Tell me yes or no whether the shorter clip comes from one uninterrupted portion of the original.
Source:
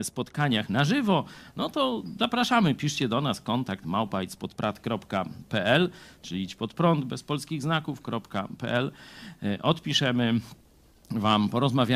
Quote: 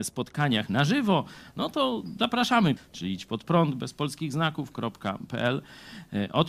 no